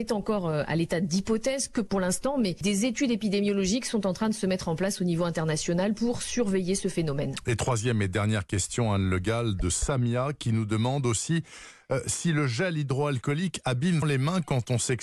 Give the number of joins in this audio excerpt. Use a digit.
1